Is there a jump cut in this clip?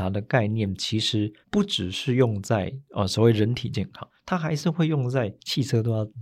yes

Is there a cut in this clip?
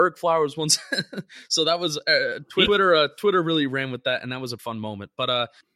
yes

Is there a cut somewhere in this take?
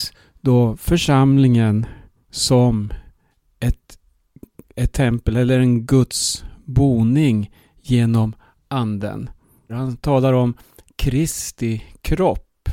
yes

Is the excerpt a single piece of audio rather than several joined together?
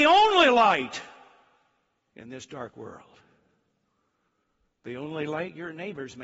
yes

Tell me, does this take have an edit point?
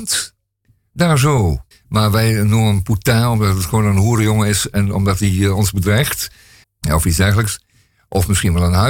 yes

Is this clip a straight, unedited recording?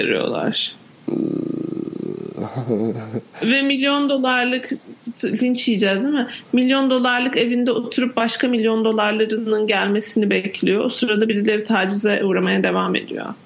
yes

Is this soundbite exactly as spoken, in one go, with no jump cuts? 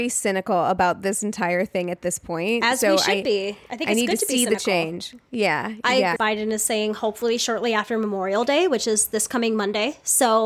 no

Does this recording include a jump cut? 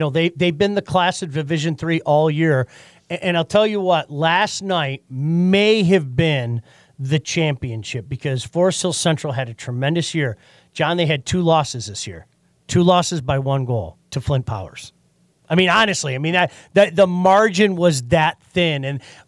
yes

